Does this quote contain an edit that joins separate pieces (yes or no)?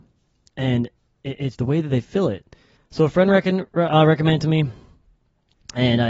yes